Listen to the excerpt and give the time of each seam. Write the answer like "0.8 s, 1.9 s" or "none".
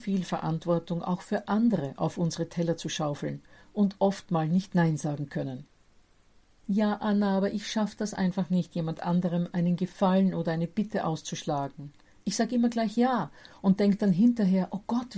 none